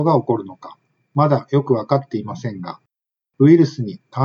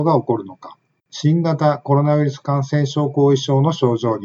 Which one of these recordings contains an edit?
second; 1 cut; at 1.0 s

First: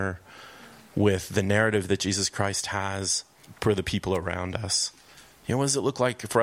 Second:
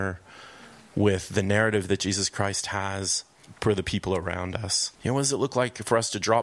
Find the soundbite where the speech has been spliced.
second; 1 cut; at 4.9 s

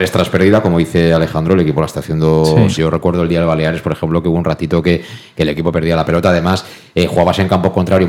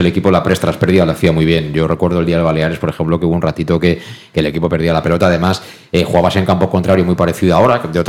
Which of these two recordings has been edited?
first; 1 cut; at 2.8 s

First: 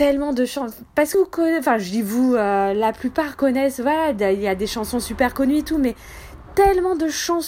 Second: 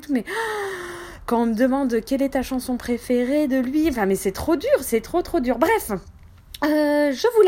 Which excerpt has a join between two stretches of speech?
first; 1 cut; at 1.1 s

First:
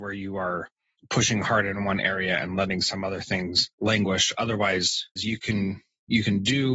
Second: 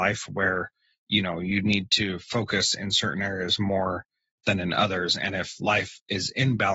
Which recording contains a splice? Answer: first; 2 cuts; at 3.7 s, 5.2 s

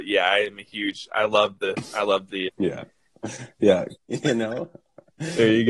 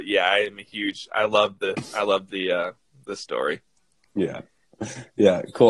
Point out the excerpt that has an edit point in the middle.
first; 2 cuts; at 2.5 s, 4.0 s

